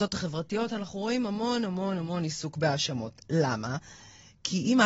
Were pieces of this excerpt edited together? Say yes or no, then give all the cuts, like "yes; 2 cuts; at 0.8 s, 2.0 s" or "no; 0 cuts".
no; 0 cuts